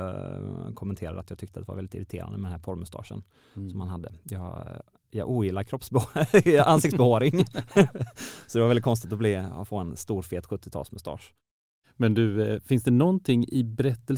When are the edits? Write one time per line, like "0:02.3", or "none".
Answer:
none